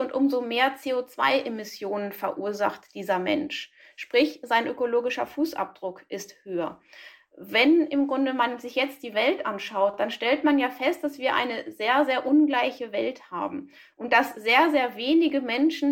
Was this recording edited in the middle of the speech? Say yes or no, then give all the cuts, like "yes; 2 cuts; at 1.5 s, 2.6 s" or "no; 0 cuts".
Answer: no; 0 cuts